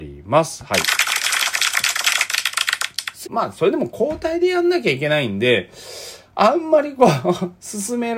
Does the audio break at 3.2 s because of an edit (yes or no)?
yes